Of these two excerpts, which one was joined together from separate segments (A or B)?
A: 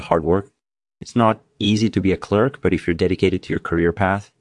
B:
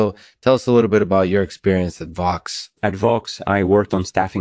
B